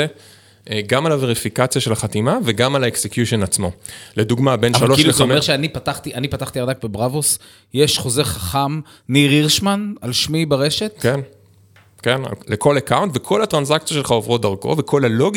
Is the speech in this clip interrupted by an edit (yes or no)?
no